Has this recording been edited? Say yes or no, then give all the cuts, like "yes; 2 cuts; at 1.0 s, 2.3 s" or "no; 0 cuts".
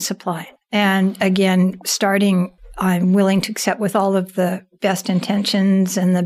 no; 0 cuts